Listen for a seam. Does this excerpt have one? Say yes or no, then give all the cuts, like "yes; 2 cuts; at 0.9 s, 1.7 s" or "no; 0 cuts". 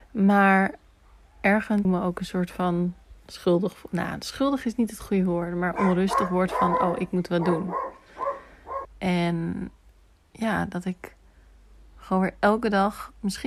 yes; 2 cuts; at 1.8 s, 8.8 s